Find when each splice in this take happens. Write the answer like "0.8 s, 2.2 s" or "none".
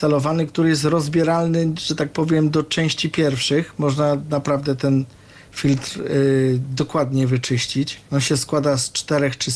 8.1 s